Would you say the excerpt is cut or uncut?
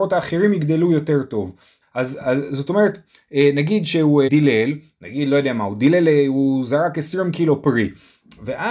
cut